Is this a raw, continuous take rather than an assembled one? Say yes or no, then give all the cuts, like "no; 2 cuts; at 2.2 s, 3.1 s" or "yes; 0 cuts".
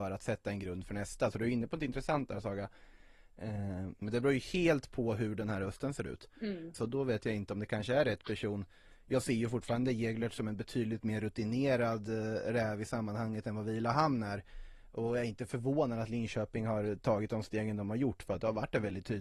no; 2 cuts; at 4.0 s, 6.7 s